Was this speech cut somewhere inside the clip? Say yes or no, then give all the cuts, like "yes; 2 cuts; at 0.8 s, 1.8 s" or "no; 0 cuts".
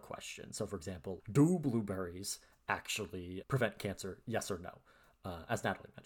yes; 2 cuts; at 1.2 s, 3.4 s